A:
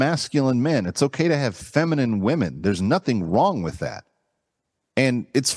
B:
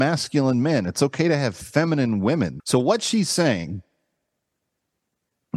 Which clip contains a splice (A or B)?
B